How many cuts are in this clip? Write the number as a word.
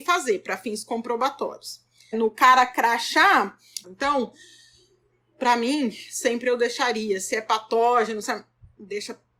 three